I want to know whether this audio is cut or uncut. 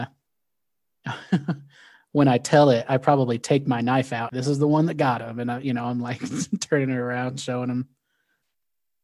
cut